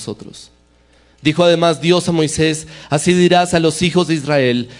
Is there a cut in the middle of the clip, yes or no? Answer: no